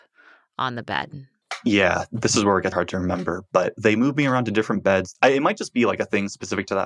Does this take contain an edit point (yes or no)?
yes